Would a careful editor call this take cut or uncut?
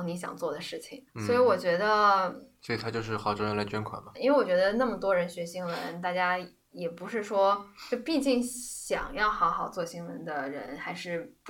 cut